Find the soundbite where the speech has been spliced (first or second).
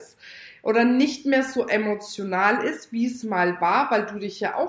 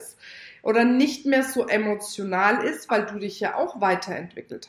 second